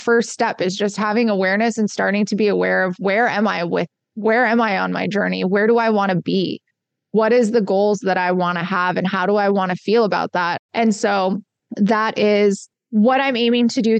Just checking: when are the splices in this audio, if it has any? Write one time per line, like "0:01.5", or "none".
0:10.6